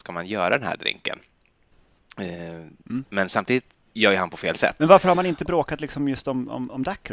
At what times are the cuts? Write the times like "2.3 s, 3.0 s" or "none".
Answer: 2.8 s